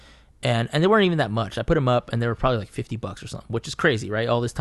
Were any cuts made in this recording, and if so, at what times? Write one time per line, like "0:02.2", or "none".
none